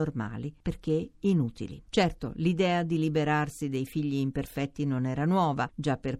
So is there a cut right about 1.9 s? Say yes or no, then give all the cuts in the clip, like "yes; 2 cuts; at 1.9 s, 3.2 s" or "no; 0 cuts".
no; 0 cuts